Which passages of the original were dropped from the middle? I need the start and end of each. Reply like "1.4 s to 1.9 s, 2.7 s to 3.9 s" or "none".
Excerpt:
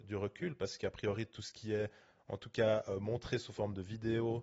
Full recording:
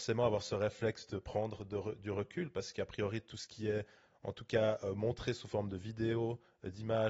none